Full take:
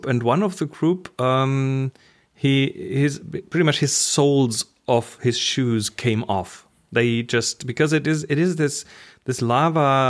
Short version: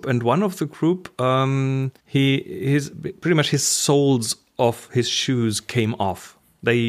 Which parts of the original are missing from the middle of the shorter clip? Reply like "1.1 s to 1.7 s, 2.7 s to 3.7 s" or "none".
2.0 s to 2.3 s